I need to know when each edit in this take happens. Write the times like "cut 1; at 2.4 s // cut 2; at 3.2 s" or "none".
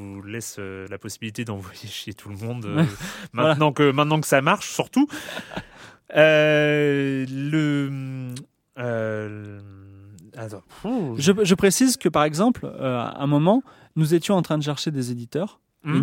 none